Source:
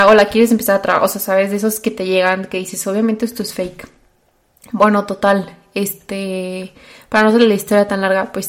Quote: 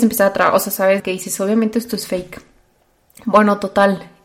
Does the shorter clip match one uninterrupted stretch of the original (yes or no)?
no